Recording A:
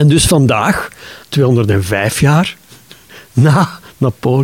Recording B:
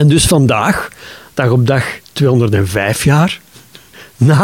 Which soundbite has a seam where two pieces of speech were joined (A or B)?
A